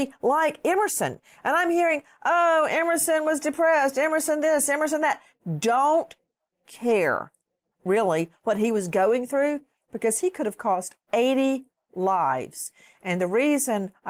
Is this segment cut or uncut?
uncut